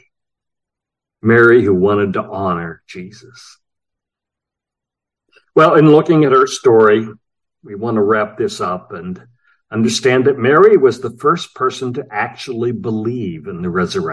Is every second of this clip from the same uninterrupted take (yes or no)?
yes